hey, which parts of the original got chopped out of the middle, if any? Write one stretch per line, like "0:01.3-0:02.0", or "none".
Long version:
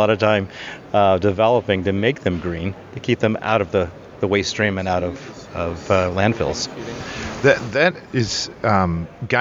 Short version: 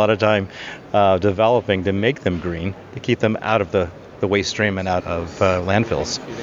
0:05.0-0:05.5